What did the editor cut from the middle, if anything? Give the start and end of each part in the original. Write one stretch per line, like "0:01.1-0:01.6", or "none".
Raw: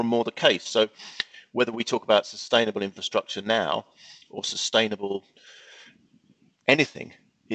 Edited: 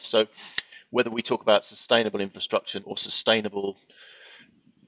0:03.4-0:04.3